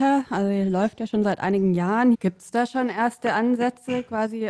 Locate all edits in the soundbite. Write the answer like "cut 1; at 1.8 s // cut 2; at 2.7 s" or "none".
cut 1; at 2.1 s

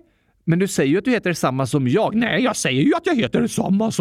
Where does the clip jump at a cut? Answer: none

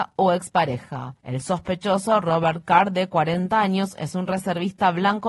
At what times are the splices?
cut 1; at 1.2 s

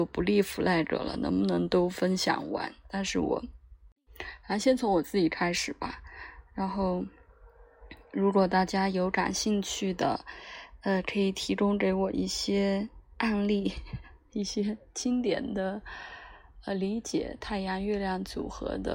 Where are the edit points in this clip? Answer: none

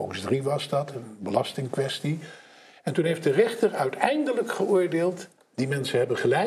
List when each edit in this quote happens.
cut 1; at 5.5 s

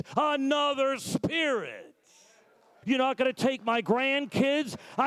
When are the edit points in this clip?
cut 1; at 2.8 s

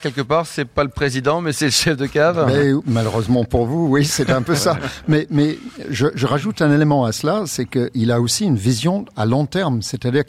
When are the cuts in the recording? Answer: none

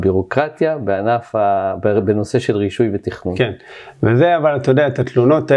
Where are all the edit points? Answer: none

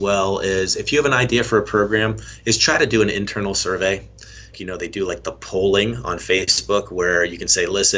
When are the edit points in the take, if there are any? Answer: cut 1; at 4.5 s

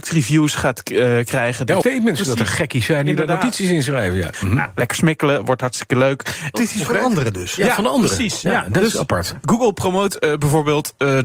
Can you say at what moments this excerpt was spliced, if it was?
cut 1; at 1.8 s // cut 2; at 4.3 s // cut 3; at 6.5 s

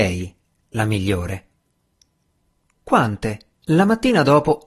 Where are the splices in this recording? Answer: cut 1; at 3.6 s

